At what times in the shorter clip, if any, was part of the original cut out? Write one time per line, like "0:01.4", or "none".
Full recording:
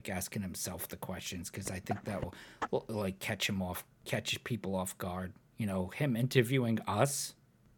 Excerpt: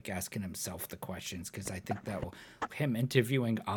0:02.7